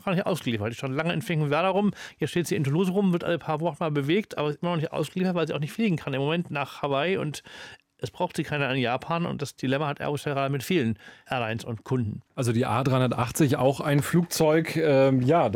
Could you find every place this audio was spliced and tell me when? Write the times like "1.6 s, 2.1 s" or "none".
none